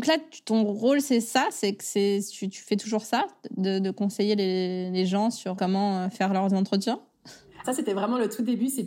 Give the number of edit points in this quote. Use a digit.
2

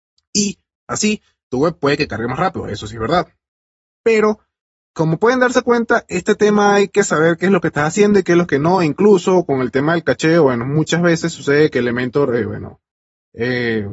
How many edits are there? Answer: 0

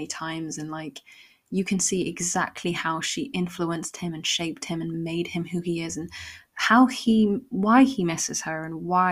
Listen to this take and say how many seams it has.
0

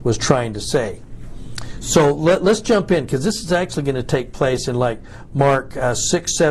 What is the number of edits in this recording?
0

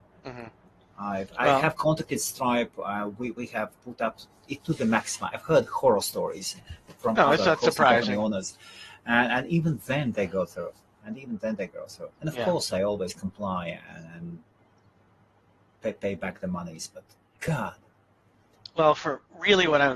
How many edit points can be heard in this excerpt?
1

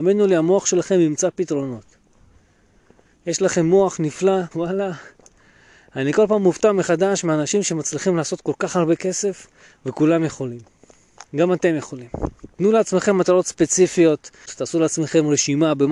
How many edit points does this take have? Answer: 3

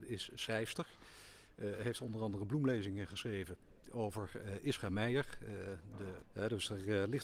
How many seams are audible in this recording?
1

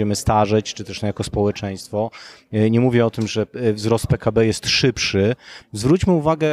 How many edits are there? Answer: 1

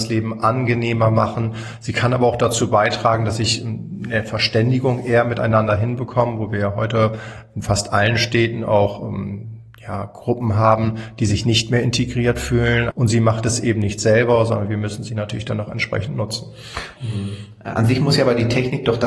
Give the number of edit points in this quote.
2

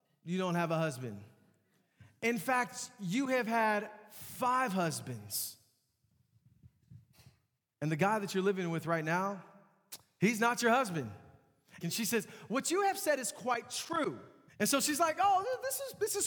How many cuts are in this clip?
2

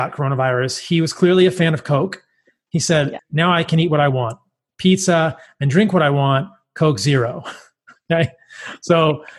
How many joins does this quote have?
1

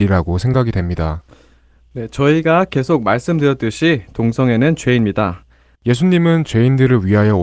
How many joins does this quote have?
1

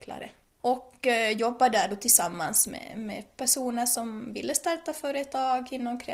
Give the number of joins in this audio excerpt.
0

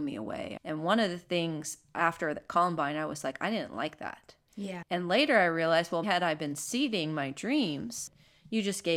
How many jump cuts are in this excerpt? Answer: 2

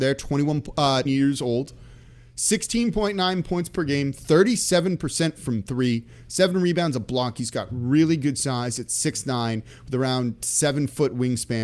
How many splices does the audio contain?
1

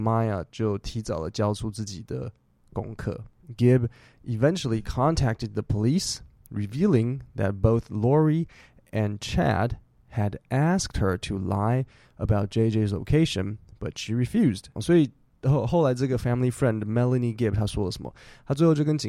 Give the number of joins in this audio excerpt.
1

